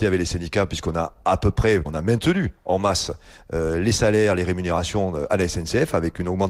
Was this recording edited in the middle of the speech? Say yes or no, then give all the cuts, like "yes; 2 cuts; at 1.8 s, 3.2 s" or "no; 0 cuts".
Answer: yes; 1 cut; at 1.8 s